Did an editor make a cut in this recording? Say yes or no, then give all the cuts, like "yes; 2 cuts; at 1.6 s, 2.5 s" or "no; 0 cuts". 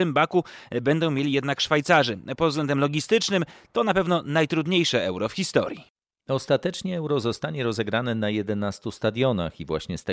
no; 0 cuts